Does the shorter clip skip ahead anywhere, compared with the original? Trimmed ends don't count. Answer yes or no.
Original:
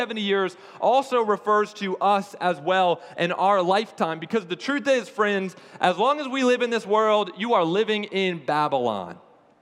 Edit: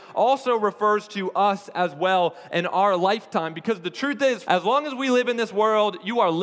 yes